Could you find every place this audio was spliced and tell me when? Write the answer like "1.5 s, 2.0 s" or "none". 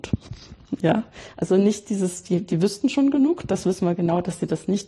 none